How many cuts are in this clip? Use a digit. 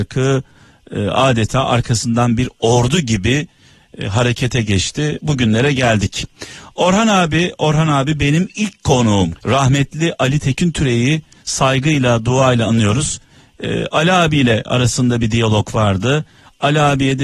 1